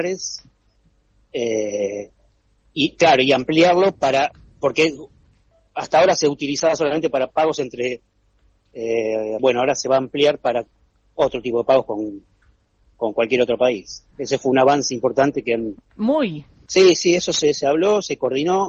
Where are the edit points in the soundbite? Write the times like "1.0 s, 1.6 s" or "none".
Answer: 9.4 s, 16.7 s